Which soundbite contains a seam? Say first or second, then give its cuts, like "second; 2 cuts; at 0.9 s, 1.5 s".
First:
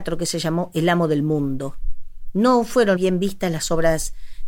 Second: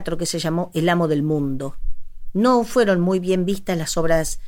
first; 1 cut; at 3.0 s